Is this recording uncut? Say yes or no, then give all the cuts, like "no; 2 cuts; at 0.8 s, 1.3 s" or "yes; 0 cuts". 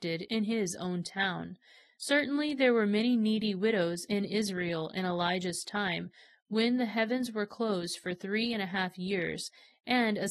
yes; 0 cuts